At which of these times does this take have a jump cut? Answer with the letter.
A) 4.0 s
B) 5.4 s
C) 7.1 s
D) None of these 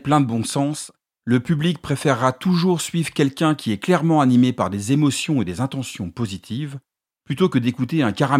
D